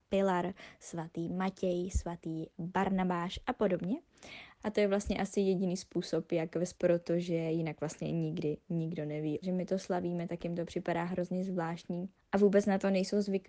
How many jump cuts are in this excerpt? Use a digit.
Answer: 3